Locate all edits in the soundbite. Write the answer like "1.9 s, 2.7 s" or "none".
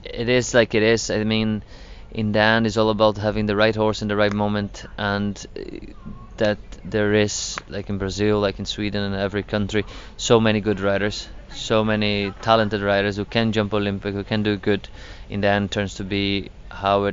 none